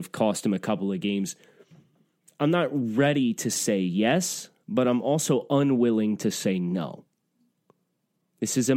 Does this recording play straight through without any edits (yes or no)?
yes